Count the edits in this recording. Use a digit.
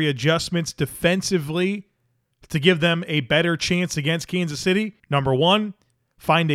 1